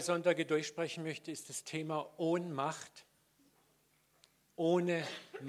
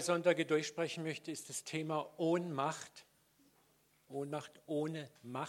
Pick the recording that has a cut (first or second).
second